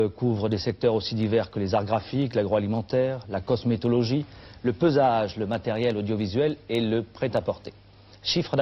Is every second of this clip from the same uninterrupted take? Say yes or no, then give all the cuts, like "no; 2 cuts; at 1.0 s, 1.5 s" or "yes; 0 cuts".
yes; 0 cuts